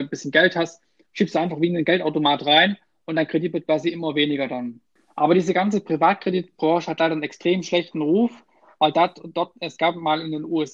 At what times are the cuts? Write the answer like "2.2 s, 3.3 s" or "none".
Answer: none